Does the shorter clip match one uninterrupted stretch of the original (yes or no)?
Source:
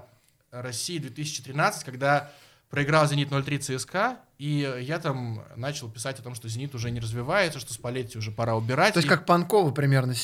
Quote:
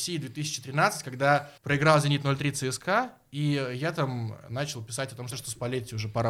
no